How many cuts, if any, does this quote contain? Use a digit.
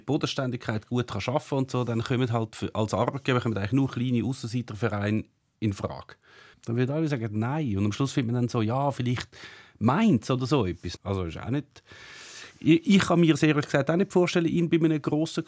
2